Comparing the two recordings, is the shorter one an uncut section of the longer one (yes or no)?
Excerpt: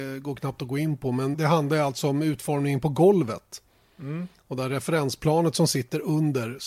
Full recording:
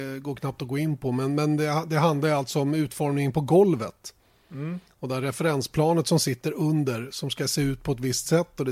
no